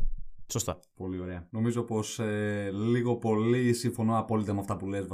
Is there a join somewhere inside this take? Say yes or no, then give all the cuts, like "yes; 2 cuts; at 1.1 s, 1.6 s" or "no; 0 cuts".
yes; 1 cut; at 1.5 s